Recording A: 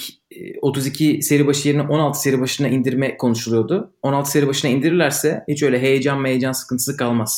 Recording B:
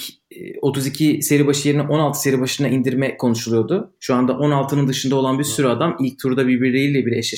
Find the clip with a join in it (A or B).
B